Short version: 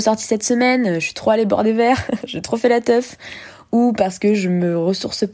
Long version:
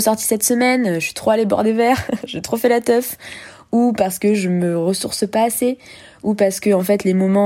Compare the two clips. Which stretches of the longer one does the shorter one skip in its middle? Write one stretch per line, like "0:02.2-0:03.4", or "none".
none